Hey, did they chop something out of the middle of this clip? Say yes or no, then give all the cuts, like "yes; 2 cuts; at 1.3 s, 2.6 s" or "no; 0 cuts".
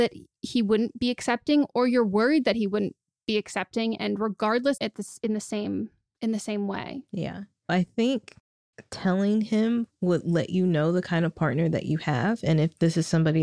yes; 2 cuts; at 4.8 s, 7.7 s